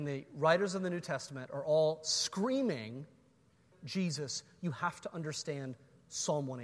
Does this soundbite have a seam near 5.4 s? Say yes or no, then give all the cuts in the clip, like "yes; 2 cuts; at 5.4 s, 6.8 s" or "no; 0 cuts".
no; 1 cut; at 3.7 s